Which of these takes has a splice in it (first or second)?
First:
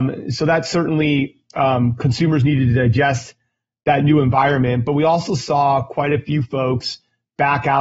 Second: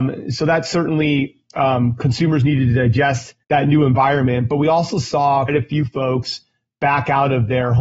second